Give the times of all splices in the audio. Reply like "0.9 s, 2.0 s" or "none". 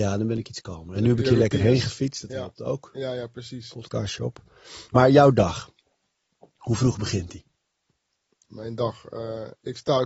none

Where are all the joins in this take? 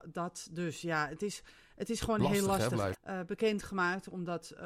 2.9 s

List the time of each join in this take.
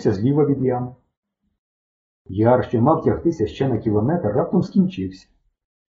2.1 s

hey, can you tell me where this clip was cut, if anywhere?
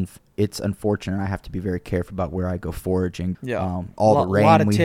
3.3 s

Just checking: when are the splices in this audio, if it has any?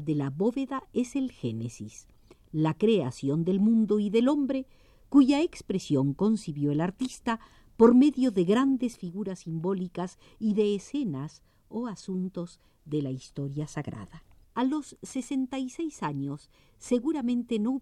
14.4 s

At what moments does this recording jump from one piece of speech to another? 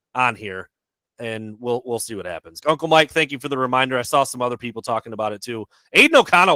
2.6 s

